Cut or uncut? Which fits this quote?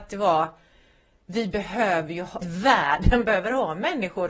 cut